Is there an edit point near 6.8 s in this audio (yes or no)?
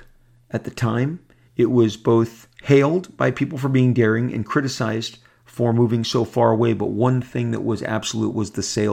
no